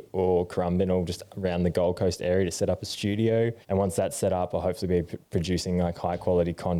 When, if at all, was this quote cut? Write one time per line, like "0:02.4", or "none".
0:03.6